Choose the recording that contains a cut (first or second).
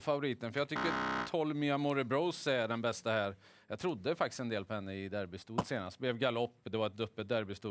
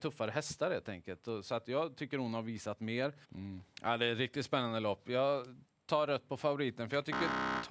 second